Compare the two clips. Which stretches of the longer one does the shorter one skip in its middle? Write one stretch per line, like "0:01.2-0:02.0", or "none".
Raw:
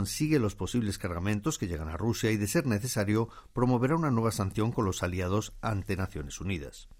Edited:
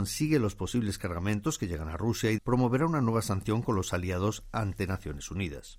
0:02.4-0:03.5